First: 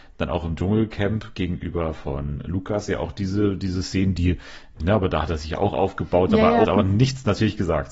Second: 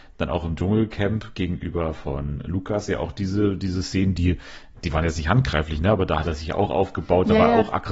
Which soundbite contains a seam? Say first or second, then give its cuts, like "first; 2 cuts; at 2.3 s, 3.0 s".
first; 2 cuts; at 4.8 s, 6.7 s